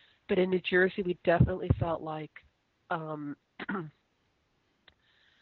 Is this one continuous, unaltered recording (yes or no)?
yes